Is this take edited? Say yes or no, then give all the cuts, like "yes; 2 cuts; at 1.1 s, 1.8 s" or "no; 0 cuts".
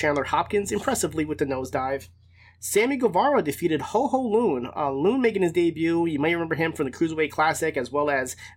no; 0 cuts